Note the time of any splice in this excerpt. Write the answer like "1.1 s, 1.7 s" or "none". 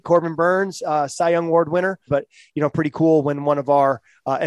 2.1 s